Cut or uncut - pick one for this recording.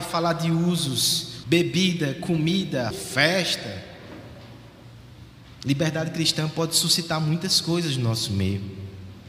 cut